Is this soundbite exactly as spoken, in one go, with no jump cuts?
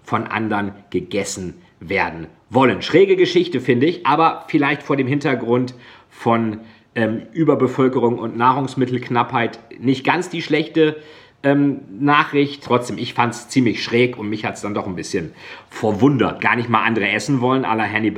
no; 2 cuts; at 12.6 s, 16.4 s

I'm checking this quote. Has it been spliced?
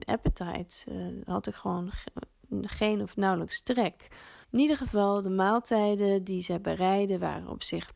yes; 1 cut; at 4.4 s

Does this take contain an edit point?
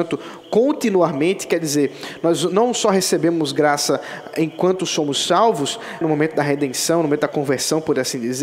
yes; 1 cut; at 6.0 s

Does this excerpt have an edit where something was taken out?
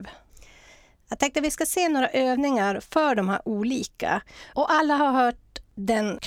yes; 1 cut; at 4.5 s

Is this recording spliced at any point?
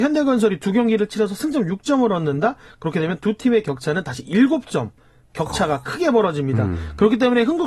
no; 0 cuts

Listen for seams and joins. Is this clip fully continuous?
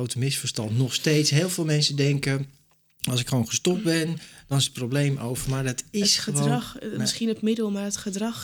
yes; 0 cuts

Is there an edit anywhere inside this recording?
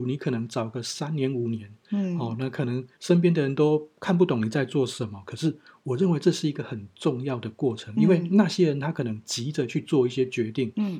yes; 1 cut; at 2.9 s

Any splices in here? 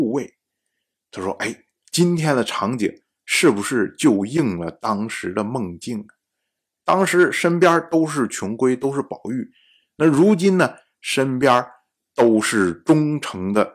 no; 0 cuts

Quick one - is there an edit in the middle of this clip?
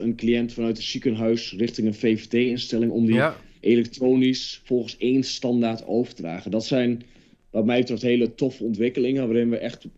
no; 0 cuts

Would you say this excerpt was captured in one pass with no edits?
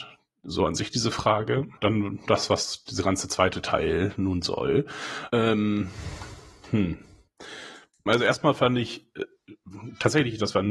no; 3 cuts; at 1.8 s, 5.3 s, 8.1 s

